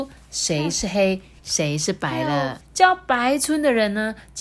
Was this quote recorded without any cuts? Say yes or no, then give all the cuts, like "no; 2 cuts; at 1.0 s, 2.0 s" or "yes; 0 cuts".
no; 1 cut; at 2.6 s